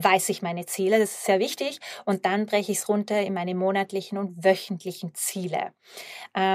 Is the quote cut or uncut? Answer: uncut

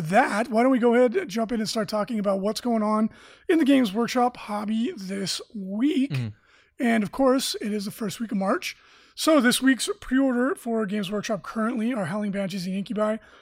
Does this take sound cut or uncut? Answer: uncut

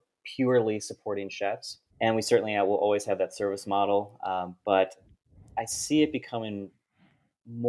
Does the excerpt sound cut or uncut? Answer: cut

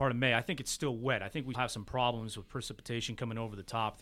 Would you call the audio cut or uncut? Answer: cut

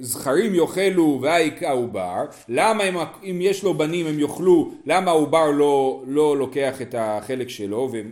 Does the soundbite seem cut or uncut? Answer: uncut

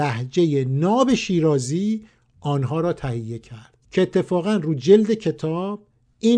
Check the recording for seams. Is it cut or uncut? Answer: cut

